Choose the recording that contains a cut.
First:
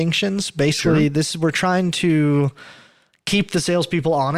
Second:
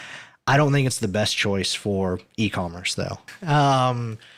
second; 1 cut; at 3.3 s

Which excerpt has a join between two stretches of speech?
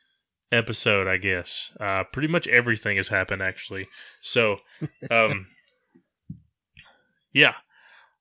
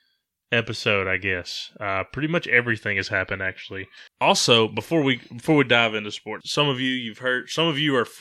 second; 2 cuts; at 4.1 s, 6.4 s

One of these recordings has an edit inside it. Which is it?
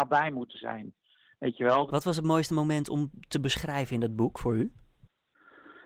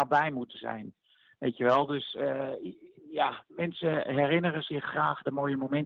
first; 1 cut; at 1.9 s

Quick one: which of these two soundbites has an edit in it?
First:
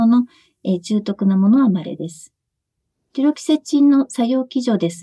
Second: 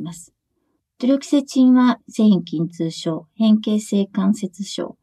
second; 1 cut; at 2.0 s

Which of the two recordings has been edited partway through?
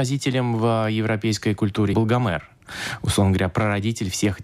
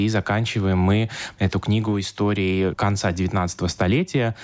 first; 1 cut; at 1.9 s

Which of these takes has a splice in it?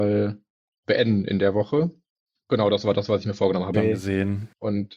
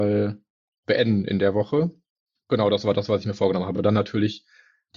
first; 1 cut; at 3.7 s

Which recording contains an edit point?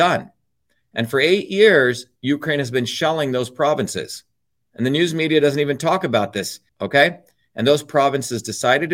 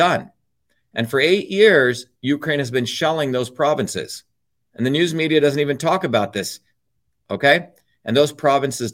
first; 1 cut; at 6.7 s

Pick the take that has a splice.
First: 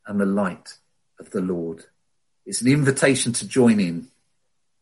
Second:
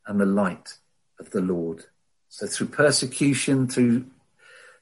second; 1 cut; at 2.1 s

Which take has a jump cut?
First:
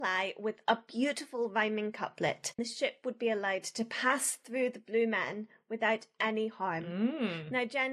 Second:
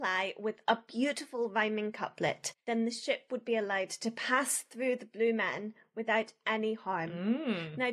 first; 1 cut; at 2.6 s

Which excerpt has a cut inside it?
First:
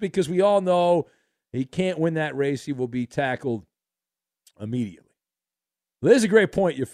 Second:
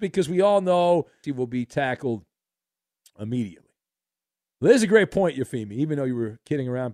second; 1 cut; at 1.2 s

